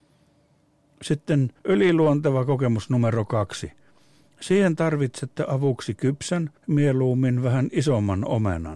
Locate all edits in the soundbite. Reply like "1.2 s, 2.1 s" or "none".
1.6 s, 6.6 s